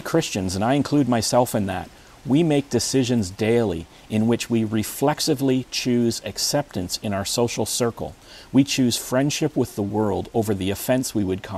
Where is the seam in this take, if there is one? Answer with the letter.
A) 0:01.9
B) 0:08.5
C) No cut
C